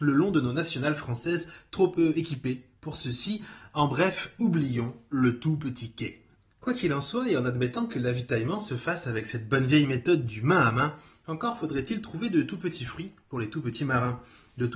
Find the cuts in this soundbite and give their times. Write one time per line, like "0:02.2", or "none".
none